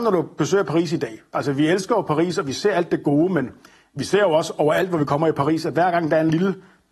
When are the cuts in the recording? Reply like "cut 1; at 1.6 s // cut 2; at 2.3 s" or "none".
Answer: none